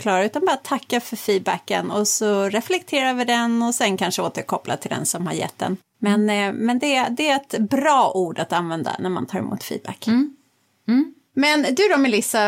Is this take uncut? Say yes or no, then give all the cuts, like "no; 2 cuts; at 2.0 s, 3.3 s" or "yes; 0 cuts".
yes; 0 cuts